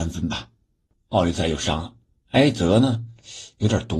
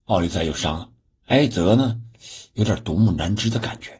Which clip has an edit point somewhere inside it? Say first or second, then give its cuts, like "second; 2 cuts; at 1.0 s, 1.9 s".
first; 1 cut; at 0.9 s